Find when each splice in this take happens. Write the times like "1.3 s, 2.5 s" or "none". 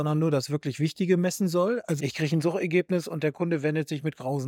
2.0 s